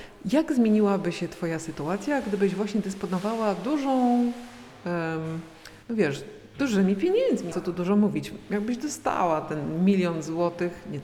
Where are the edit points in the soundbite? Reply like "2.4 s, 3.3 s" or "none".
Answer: 5.8 s, 7.5 s